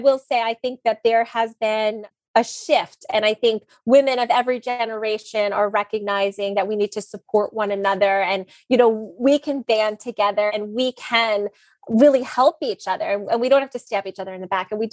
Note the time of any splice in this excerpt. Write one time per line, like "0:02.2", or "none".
0:10.5